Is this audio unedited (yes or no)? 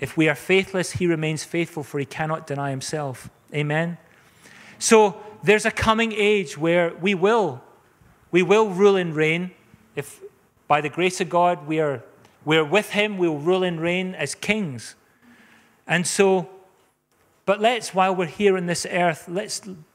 yes